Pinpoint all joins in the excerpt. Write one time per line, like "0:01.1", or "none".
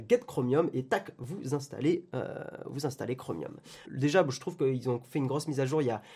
0:03.8